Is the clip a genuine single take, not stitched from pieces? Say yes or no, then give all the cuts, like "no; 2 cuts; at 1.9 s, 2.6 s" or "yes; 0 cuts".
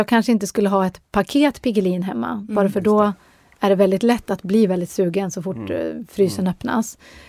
yes; 0 cuts